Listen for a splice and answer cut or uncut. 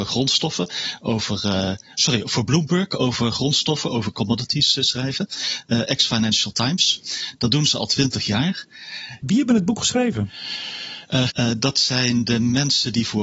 cut